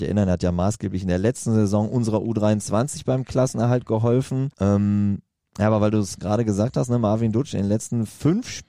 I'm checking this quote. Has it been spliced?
yes; 2 cuts; at 4.5 s, 6.2 s

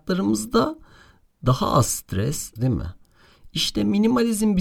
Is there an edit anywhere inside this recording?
yes; 1 cut; at 2.6 s

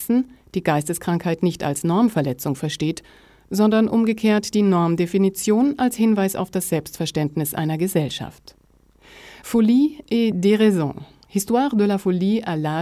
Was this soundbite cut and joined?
no; 0 cuts

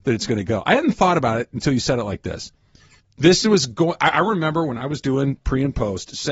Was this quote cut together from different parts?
yes; 1 cut; at 3.0 s

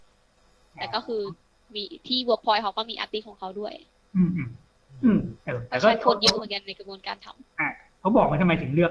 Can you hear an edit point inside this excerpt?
yes; 1 cut; at 5.4 s

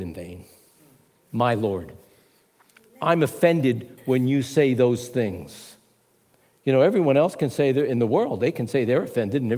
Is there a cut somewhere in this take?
no; 0 cuts

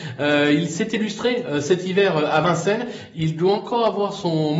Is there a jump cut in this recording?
no; 0 cuts

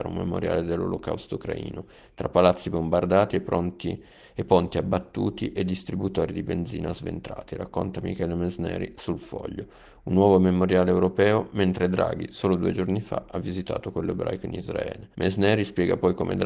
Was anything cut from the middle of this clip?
yes; 1 cut; at 15.1 s

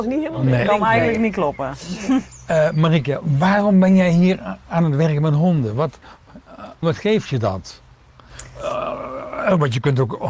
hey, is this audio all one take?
no; 1 cut; at 6.8 s

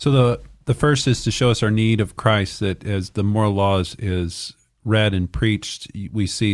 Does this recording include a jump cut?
no; 0 cuts

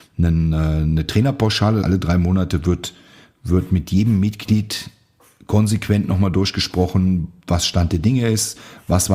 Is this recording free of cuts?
no; 1 cut; at 1.8 s

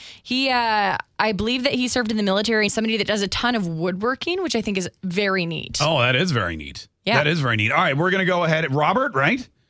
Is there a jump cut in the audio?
yes; 1 cut; at 2.7 s

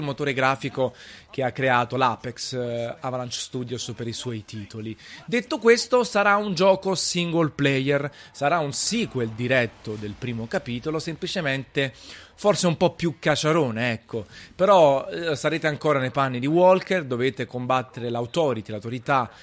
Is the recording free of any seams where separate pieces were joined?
yes; 0 cuts

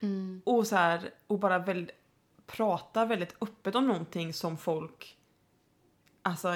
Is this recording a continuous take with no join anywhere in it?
yes; 0 cuts

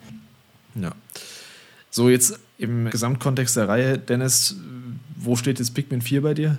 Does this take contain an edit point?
yes; 1 cut; at 2.9 s

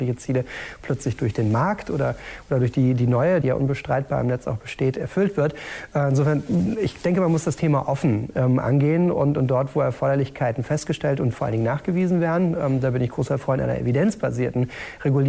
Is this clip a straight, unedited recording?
no; 1 cut; at 3.4 s

